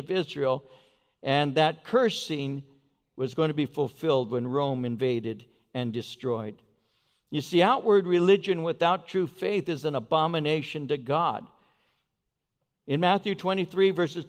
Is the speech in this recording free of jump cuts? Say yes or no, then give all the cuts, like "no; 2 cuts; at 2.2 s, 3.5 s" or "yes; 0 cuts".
yes; 0 cuts